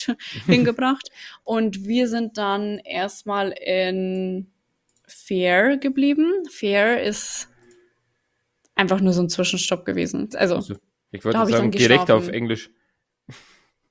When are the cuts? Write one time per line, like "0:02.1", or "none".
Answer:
0:10.3